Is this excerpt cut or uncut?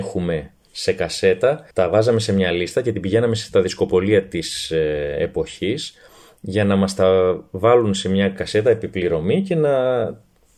cut